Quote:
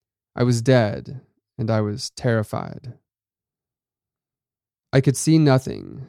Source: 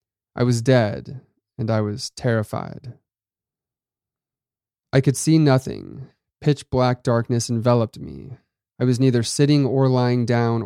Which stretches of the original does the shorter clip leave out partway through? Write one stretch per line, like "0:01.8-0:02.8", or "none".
none